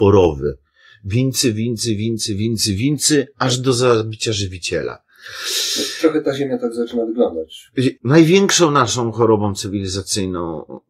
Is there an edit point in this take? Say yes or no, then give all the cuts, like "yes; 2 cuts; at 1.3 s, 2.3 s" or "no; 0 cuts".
yes; 1 cut; at 8.0 s